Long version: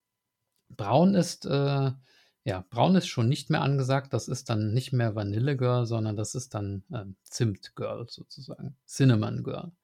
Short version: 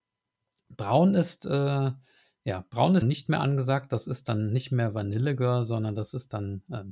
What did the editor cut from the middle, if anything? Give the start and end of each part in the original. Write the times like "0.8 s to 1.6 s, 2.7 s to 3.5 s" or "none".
3.0 s to 3.2 s

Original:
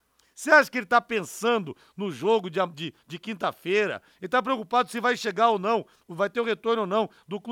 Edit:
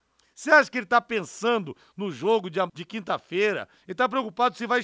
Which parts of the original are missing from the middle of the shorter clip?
2.7 s to 3.0 s

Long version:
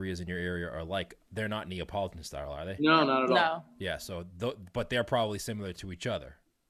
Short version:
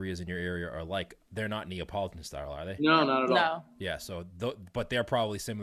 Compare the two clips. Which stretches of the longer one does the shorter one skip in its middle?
none

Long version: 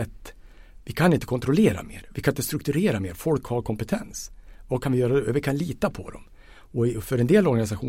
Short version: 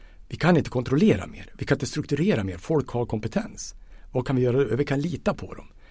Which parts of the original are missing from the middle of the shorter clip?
none

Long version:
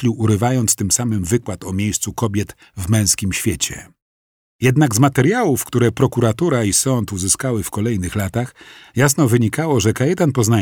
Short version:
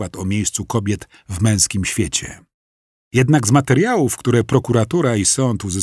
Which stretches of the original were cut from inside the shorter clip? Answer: none

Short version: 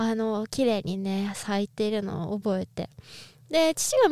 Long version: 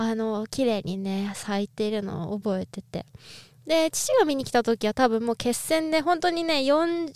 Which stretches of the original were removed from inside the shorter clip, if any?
2.7 s to 2.8 s

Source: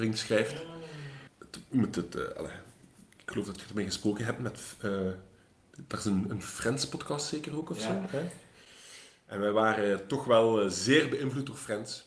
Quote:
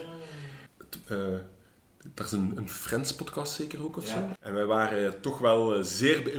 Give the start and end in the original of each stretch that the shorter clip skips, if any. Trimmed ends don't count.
1.6 s to 4.8 s, 8.1 s to 9.2 s

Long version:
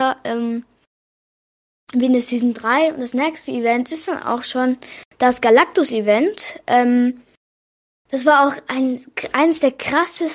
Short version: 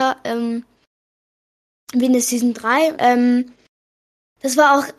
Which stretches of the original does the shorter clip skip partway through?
2.9 s to 6.6 s

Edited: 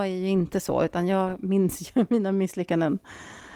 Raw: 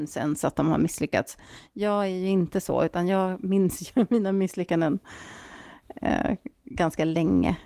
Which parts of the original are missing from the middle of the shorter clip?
none

